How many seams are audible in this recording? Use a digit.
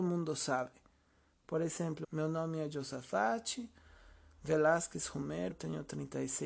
2